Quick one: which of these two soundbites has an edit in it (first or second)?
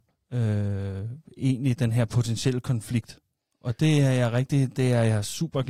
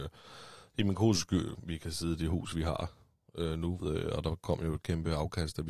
second